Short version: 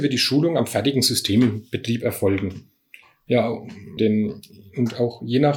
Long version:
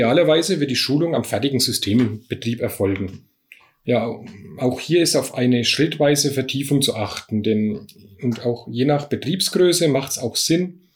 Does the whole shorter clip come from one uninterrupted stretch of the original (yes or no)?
no